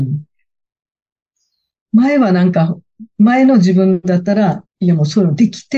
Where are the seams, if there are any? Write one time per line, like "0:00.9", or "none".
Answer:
0:04.6

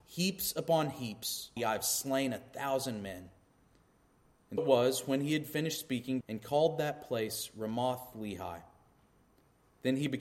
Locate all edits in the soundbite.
0:01.6
0:04.6
0:06.2

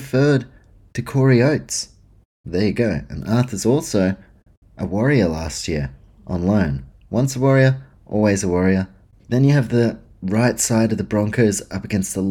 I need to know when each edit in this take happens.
0:09.2

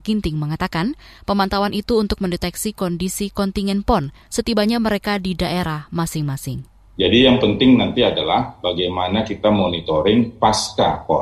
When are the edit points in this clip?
none

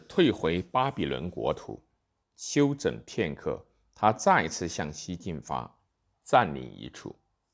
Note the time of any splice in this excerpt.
0:02.2
0:06.1

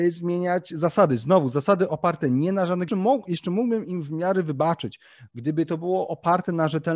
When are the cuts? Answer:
0:02.9

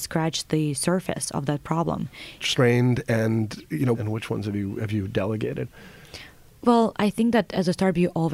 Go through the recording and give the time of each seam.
0:02.4
0:03.9

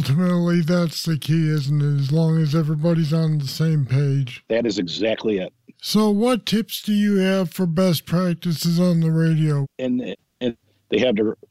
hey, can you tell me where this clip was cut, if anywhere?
0:05.7
0:09.6

